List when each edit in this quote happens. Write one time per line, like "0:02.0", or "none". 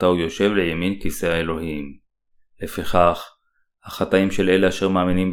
none